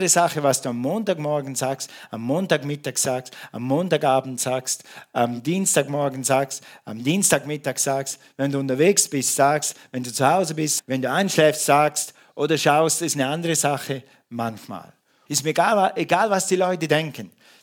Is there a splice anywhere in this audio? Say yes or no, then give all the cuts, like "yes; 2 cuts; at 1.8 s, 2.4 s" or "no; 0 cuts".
yes; 2 cuts; at 10.8 s, 15.3 s